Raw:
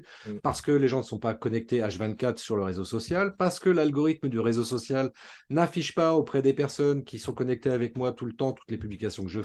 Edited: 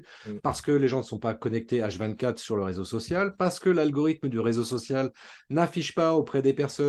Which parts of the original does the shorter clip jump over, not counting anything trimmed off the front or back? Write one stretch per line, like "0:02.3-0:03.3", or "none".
none

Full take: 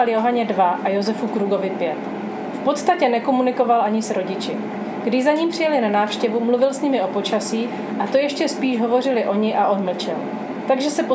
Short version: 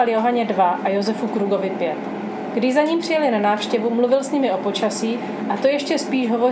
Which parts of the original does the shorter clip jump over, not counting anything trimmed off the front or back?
0:02.5-0:05.0

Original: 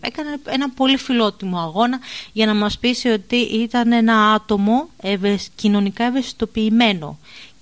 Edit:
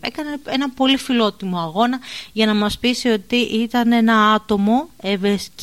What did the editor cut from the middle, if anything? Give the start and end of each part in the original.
none

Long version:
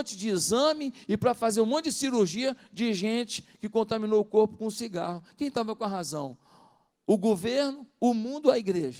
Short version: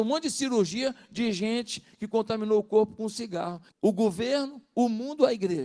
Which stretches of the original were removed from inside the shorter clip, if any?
0:05.3-0:07.0

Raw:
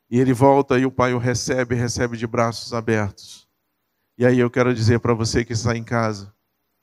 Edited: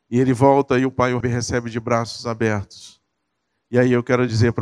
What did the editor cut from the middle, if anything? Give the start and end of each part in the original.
0:01.2-0:01.7

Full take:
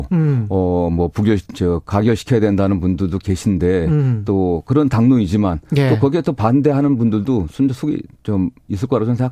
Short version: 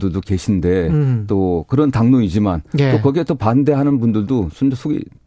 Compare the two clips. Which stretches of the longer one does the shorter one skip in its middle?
none

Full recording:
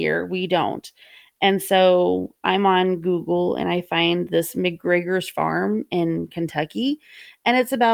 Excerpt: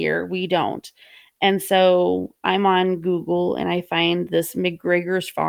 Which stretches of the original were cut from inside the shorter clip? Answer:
none

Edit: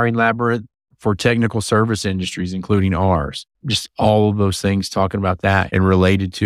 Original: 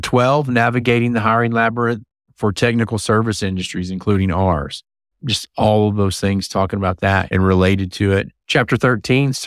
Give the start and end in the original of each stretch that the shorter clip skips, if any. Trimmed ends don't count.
0:04.9-0:05.1

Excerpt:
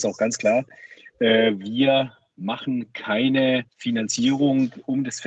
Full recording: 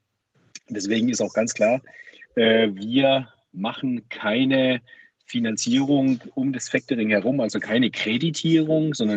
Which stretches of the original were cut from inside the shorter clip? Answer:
0:04.8-0:05.2

